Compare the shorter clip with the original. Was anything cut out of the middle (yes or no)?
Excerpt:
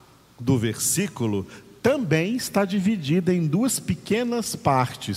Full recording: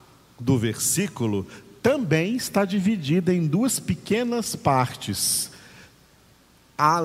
no